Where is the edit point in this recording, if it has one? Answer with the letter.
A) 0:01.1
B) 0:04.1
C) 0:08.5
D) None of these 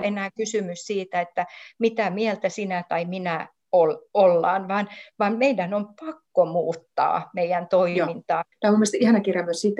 C